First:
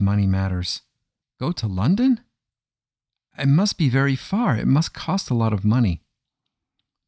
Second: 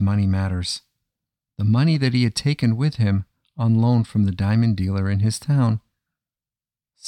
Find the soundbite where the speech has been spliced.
first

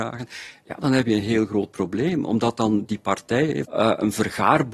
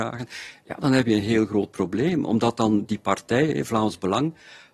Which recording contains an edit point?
first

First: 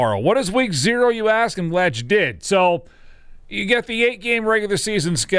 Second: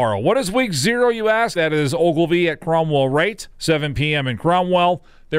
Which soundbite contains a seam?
second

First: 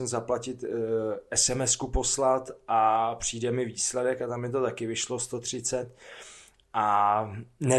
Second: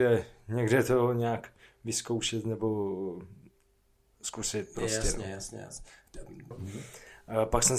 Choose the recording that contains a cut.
second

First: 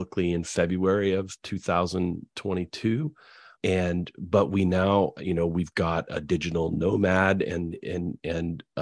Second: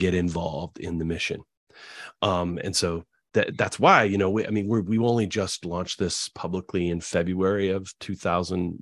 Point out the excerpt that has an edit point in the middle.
first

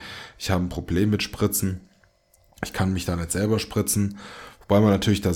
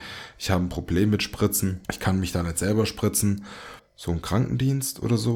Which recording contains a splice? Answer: second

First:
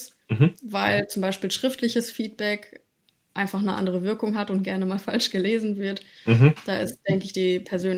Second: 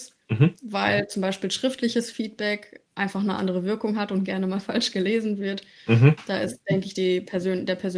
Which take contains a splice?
second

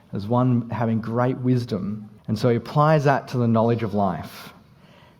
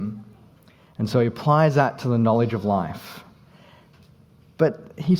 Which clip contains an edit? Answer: first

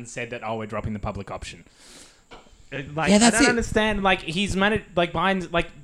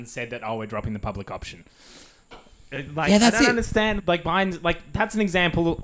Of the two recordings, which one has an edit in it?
second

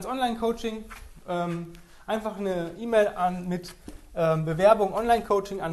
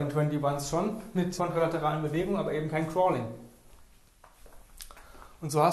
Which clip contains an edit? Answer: second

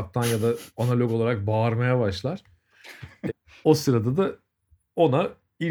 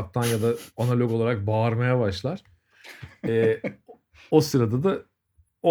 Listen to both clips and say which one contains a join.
first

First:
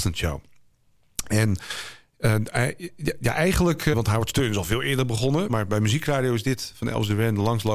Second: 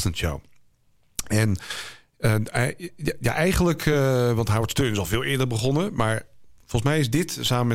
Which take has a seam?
first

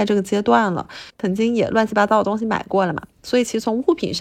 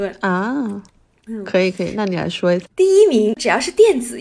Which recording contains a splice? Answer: second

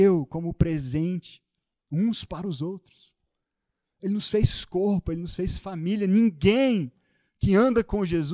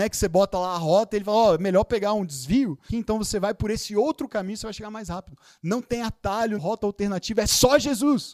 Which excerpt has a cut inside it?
second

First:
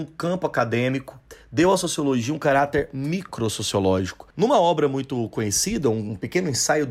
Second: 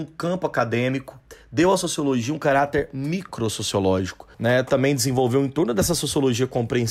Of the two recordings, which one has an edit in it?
first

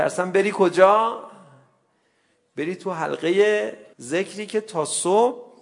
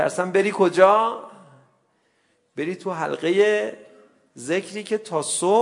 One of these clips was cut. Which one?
first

